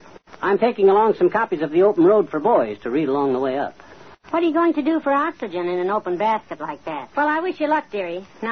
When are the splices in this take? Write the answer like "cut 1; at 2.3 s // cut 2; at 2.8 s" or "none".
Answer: cut 1; at 7.1 s